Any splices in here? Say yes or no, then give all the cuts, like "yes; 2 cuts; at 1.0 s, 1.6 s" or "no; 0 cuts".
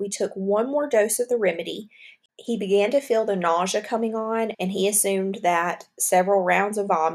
yes; 2 cuts; at 2.3 s, 4.5 s